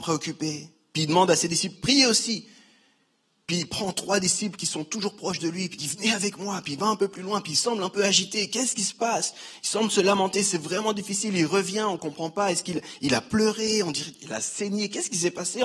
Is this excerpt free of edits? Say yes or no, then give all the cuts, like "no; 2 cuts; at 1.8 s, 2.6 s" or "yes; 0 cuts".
no; 1 cut; at 1.8 s